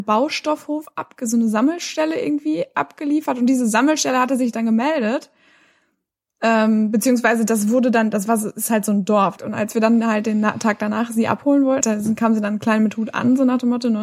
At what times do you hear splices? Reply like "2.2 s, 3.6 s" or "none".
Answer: 9.4 s, 11.8 s